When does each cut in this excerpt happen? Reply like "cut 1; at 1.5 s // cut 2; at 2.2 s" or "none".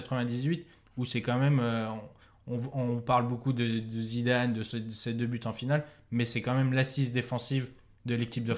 none